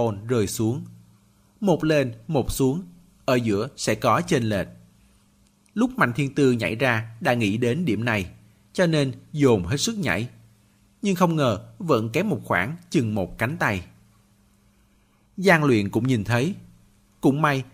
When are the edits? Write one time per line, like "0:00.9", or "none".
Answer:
none